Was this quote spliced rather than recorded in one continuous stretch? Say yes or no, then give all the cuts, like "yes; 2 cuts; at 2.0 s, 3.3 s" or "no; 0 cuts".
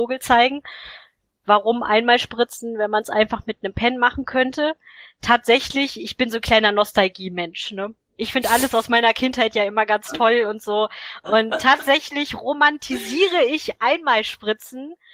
no; 0 cuts